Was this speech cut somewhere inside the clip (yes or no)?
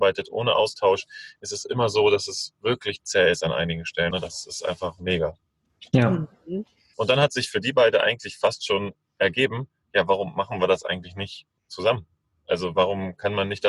yes